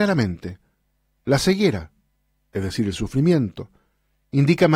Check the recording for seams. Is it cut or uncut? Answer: cut